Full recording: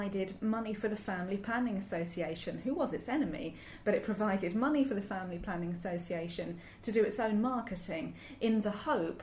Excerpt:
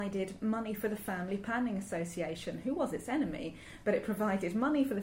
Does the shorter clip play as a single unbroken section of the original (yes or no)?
yes